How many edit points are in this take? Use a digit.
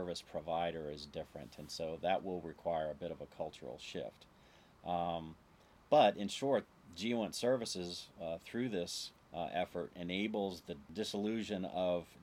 0